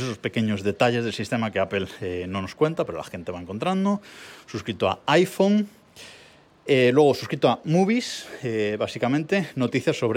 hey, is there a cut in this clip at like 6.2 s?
no; 0 cuts

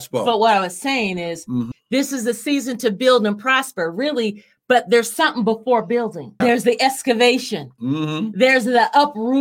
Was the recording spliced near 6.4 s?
yes; 2 cuts; at 1.7 s, 6.4 s

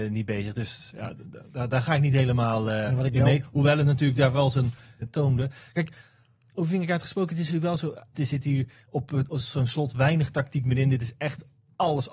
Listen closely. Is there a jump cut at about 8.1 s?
yes; 2 cuts; at 5.0 s, 8.1 s

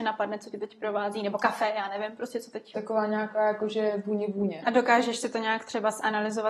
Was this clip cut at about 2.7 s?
yes; 2 cuts; at 2.7 s, 4.6 s

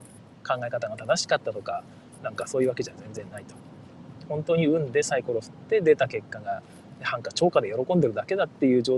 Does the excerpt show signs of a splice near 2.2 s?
yes; 1 cut; at 2.2 s

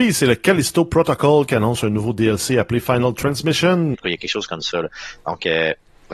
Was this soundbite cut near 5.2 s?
no; 1 cut; at 3.9 s

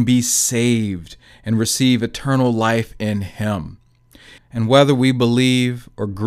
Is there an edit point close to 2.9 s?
no; 1 cut; at 4.4 s

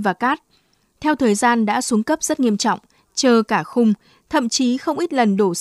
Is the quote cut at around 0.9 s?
no; 1 cut; at 3.0 s

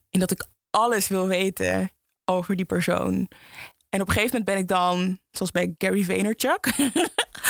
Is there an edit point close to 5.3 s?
yes; 1 cut; at 5.3 s

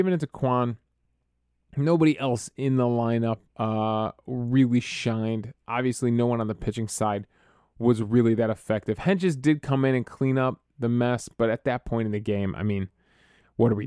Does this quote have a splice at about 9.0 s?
no; 0 cuts

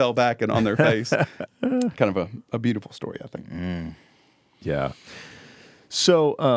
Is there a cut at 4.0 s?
no; 1 cut; at 1.5 s

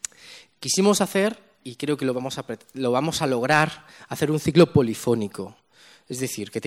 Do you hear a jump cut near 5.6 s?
no; 0 cuts

